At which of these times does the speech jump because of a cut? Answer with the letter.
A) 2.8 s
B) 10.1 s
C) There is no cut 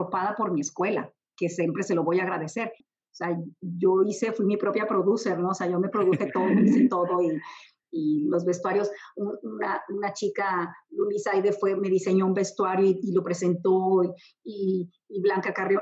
A